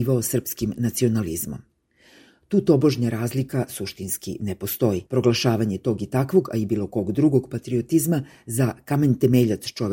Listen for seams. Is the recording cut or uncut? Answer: cut